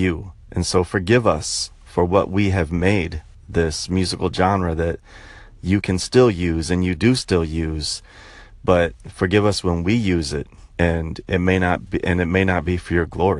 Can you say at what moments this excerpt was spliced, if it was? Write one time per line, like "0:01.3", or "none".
0:10.7
0:11.9